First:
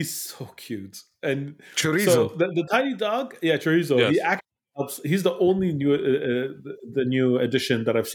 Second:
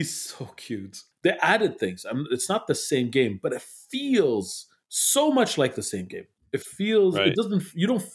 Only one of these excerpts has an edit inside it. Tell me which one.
second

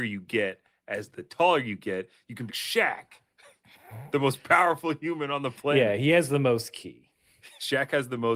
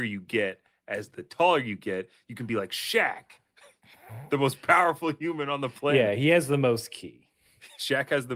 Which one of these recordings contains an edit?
first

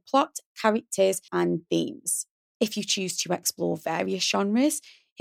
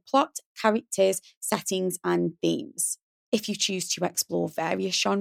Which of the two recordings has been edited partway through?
first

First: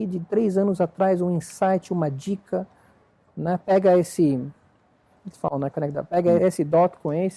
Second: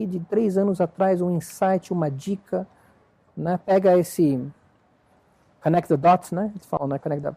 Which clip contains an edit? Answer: first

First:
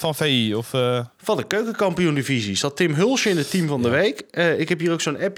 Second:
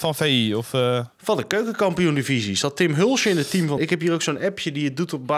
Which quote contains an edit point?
second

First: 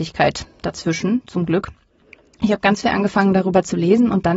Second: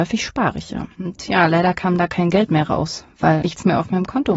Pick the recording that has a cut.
second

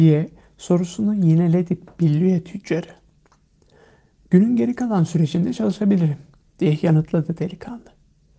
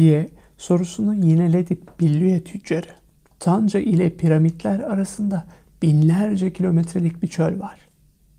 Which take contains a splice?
second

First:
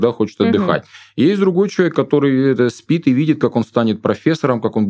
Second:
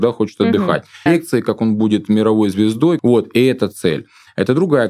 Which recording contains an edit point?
second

